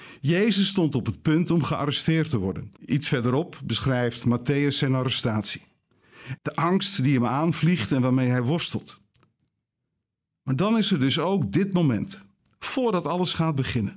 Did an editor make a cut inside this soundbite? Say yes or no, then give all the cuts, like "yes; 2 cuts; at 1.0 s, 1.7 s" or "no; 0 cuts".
yes; 2 cuts; at 2.8 s, 6.4 s